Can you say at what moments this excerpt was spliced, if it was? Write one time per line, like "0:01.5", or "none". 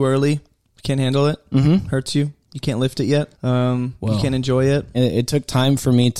0:03.3
0:04.9